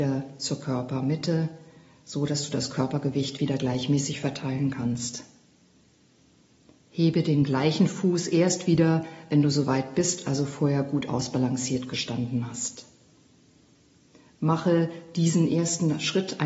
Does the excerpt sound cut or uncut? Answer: uncut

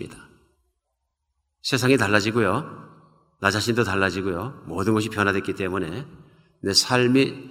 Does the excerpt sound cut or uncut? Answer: uncut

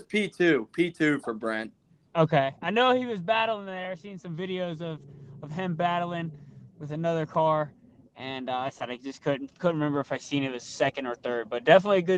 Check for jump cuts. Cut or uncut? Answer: uncut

